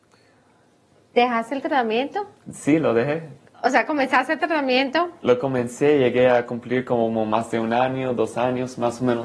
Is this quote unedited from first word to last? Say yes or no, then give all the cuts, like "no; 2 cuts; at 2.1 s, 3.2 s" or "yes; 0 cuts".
yes; 0 cuts